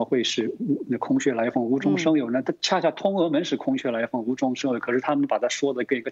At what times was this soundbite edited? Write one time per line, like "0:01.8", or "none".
none